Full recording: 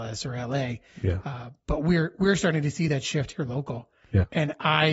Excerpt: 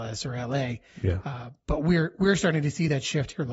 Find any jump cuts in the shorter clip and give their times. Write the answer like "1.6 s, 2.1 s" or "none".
none